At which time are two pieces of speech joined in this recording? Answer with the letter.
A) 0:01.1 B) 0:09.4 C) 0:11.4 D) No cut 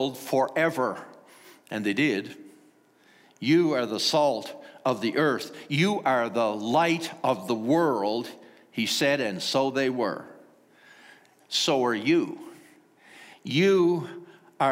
C